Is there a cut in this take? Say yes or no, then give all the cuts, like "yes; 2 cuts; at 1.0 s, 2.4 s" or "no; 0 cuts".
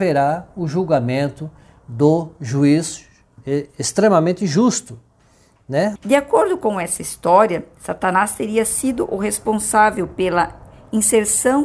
yes; 1 cut; at 6.0 s